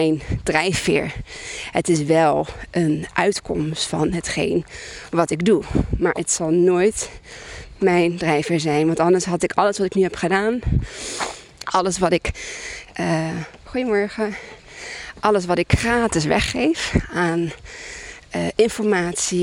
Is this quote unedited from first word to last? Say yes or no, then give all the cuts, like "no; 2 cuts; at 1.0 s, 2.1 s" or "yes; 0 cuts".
no; 1 cut; at 11.6 s